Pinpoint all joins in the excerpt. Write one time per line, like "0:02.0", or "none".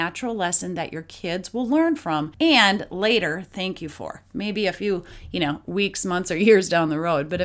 none